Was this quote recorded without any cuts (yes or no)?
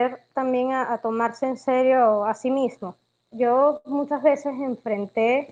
no